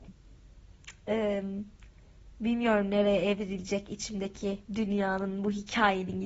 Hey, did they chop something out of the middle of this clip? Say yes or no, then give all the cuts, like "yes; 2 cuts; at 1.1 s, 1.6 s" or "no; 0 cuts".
yes; 1 cut; at 4.6 s